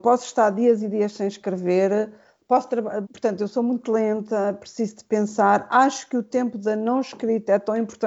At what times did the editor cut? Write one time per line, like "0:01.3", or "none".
0:03.0